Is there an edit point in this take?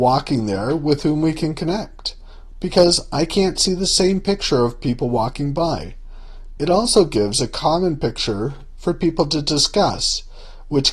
yes; 2 cuts; at 2.5 s, 6.6 s

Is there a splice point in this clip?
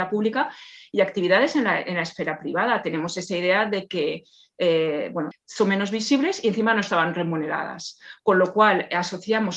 yes; 1 cut; at 5.3 s

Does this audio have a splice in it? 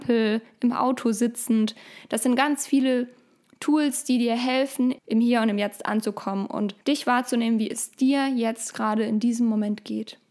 yes; 2 cuts; at 5.0 s, 6.8 s

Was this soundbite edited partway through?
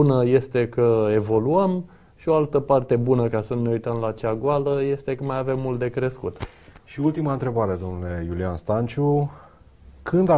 no; 0 cuts

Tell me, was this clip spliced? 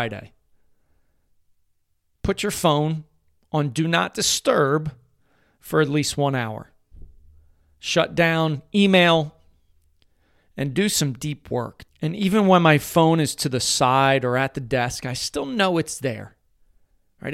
yes; 1 cut; at 11.9 s

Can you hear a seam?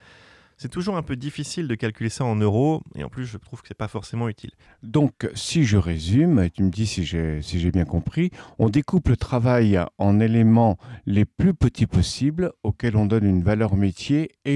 yes; 1 cut; at 4.7 s

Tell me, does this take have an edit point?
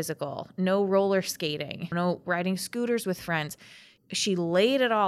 yes; 1 cut; at 1.9 s

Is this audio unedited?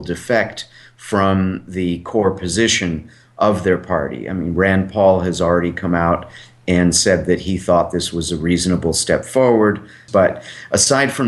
no; 1 cut; at 10.1 s

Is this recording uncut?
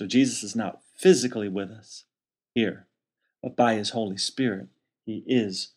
yes; 0 cuts

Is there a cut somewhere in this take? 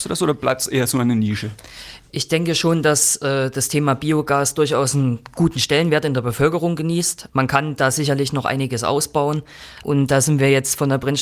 yes; 2 cuts; at 7.3 s, 9.8 s

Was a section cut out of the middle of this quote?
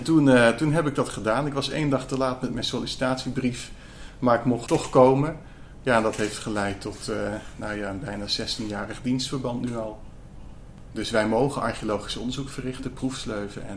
yes; 1 cut; at 10.9 s

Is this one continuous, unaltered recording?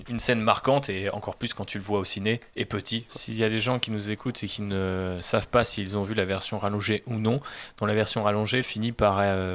no; 2 cuts; at 3.1 s, 8.6 s

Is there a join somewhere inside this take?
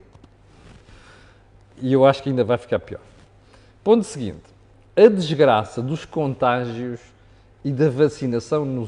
no; 0 cuts

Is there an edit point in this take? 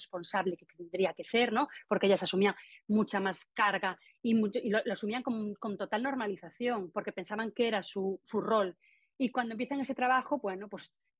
yes; 1 cut; at 8.3 s

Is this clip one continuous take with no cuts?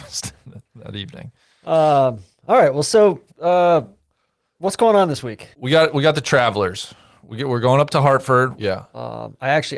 no; 2 cuts; at 5.5 s, 8.6 s

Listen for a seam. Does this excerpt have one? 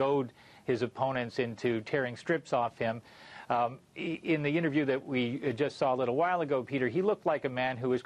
no; 0 cuts

